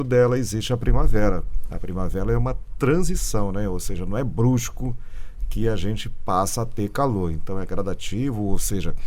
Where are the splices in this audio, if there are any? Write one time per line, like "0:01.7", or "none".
none